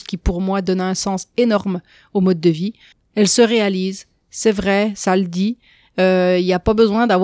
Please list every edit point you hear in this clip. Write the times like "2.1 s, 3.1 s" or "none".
none

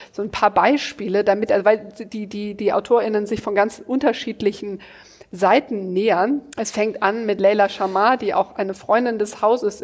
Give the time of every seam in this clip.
6.5 s

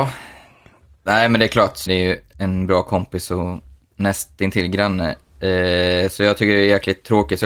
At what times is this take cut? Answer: 1.9 s

